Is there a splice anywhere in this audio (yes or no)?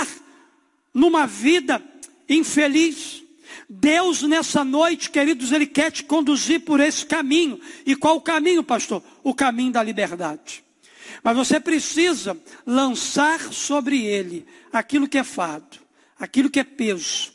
no